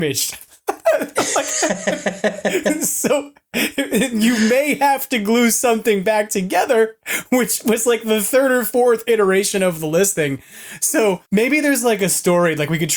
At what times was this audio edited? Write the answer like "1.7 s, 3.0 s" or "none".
11.3 s